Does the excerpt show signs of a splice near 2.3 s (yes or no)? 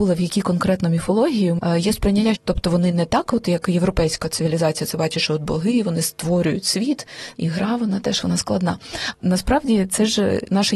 yes